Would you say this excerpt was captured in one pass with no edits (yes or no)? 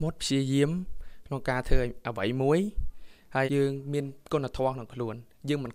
no